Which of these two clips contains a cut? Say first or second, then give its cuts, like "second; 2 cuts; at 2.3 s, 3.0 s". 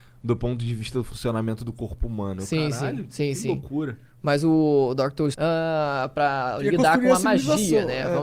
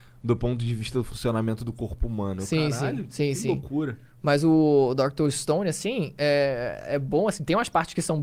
first; 1 cut; at 5.3 s